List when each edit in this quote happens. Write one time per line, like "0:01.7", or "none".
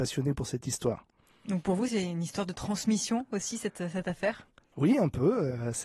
none